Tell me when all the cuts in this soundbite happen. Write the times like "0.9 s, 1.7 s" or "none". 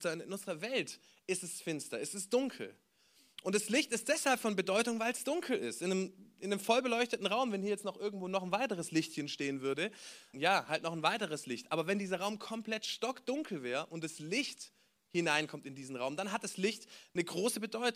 10.3 s